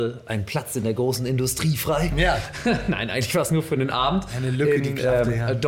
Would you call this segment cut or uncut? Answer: uncut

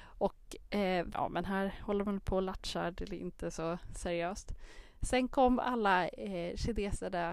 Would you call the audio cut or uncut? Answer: cut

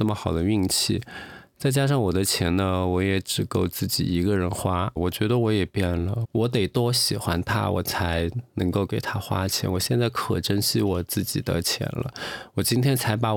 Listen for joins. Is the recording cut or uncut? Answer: cut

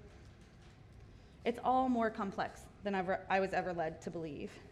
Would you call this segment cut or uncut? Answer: uncut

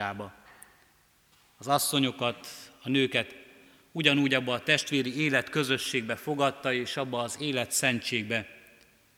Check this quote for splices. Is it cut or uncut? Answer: uncut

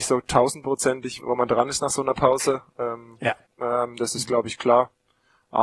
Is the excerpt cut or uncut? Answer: cut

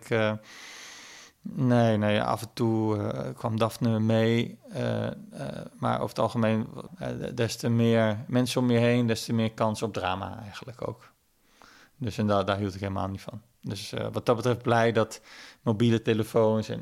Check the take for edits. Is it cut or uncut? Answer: uncut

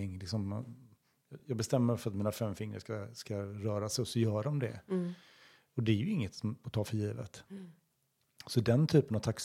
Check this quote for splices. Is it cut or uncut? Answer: uncut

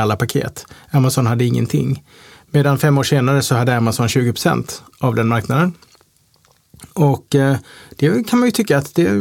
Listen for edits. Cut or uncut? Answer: uncut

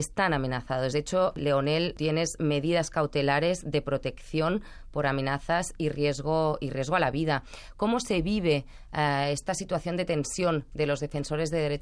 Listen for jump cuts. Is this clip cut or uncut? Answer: uncut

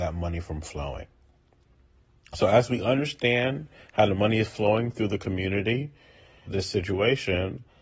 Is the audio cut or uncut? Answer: cut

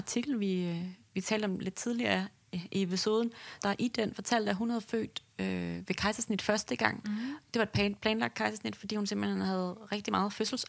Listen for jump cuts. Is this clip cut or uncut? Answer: cut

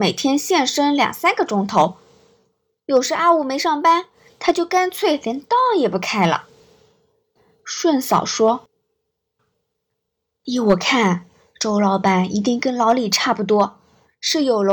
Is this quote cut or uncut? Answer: uncut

